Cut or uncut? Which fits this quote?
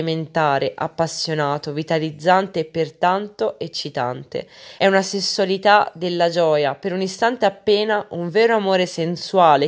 cut